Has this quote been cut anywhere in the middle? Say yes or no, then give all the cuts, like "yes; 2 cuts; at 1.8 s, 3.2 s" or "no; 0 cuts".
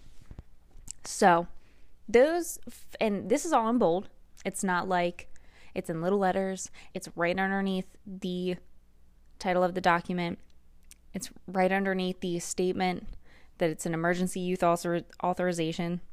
yes; 1 cut; at 6.9 s